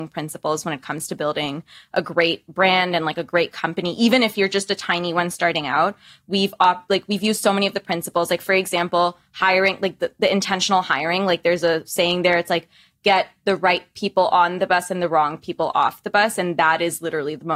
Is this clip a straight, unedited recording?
yes; 0 cuts

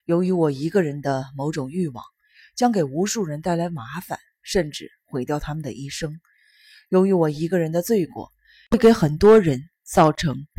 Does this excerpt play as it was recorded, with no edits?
yes; 0 cuts

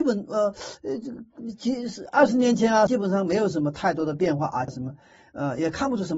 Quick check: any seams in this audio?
yes; 2 cuts; at 2.9 s, 4.7 s

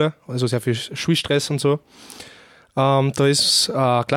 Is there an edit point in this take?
no; 0 cuts

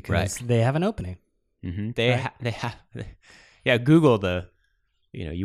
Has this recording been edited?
no; 0 cuts

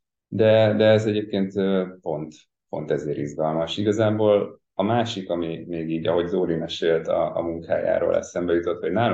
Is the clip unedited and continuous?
yes; 0 cuts

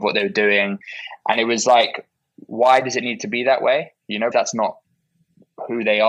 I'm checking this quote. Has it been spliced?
yes; 1 cut; at 4.3 s

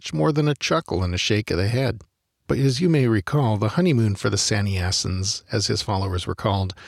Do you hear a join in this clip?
yes; 1 cut; at 2.4 s

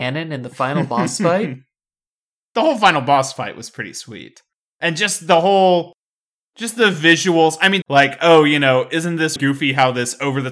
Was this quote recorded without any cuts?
no; 2 cuts; at 7.8 s, 9.4 s

